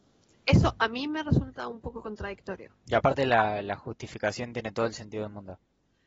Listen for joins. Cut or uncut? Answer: uncut